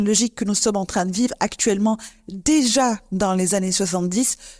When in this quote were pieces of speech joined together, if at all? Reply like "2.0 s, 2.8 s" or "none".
none